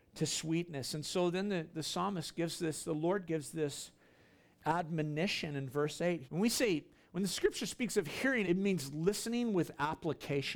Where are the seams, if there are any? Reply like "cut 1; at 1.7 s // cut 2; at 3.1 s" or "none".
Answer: cut 1; at 6.2 s // cut 2; at 8.4 s